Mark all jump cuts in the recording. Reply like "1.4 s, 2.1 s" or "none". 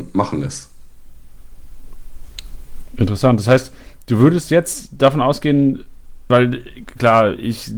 6.3 s